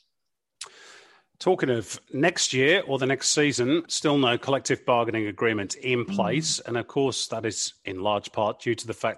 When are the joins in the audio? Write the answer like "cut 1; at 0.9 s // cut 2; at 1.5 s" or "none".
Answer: cut 1; at 3.9 s